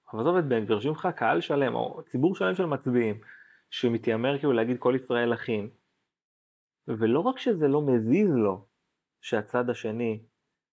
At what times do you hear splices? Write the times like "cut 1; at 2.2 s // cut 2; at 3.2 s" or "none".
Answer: none

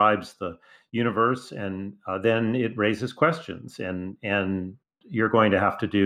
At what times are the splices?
none

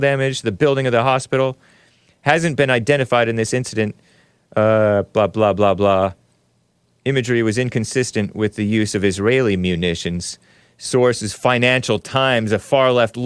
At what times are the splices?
none

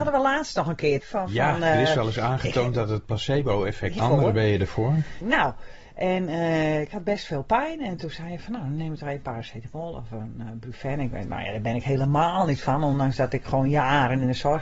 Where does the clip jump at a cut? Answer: cut 1; at 1.0 s // cut 2; at 4.0 s // cut 3; at 5.2 s

